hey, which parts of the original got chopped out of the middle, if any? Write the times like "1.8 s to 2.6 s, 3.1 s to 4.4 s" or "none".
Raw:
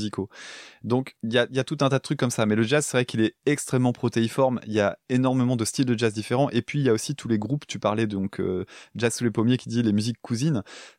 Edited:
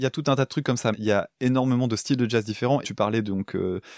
2.4 s to 4.6 s, 6.5 s to 7.7 s